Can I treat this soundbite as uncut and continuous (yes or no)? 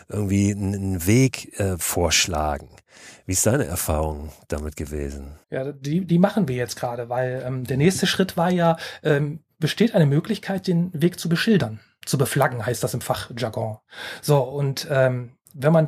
no